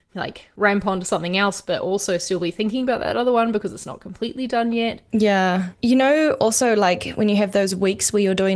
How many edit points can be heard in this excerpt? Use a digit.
1